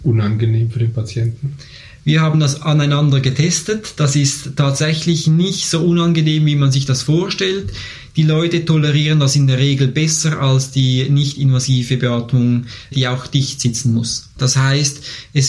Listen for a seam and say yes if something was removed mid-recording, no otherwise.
yes